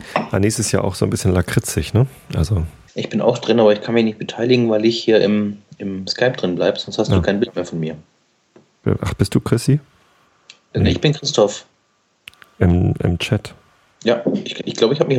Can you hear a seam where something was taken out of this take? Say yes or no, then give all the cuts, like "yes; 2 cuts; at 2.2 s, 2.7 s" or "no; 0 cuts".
yes; 1 cut; at 2.9 s